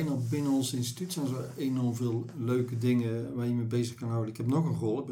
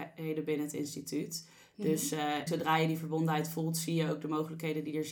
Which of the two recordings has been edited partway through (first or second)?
second